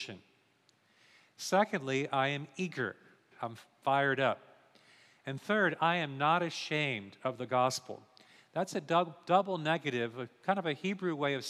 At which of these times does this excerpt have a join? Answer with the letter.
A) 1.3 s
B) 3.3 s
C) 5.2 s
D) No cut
B